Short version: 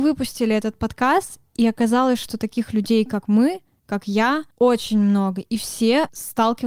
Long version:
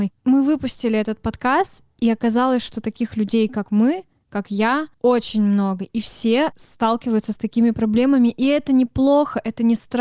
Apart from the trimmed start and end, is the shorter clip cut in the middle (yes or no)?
no